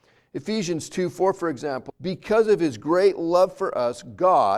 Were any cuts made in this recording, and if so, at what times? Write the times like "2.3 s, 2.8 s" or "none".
1.9 s

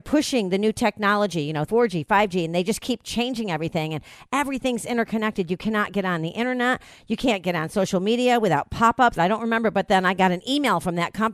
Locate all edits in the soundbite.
1.7 s, 9.2 s

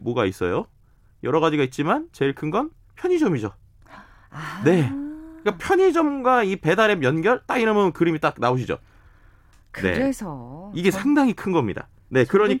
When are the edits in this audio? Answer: none

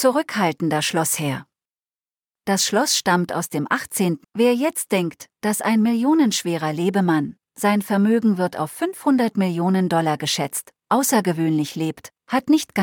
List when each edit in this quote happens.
4.2 s

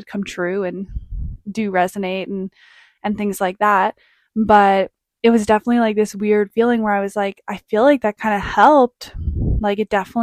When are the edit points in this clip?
none

